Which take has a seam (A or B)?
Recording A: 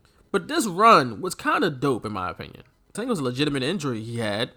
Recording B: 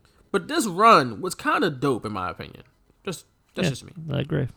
A